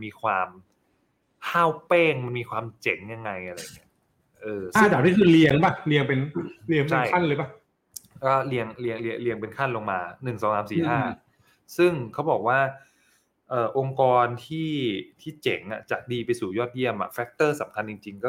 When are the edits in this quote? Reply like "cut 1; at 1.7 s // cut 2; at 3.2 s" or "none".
none